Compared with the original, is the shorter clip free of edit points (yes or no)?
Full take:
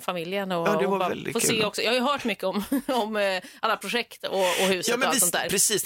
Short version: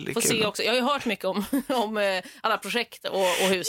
yes